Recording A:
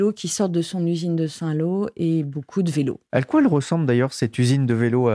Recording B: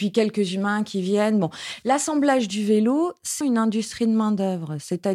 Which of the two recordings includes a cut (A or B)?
B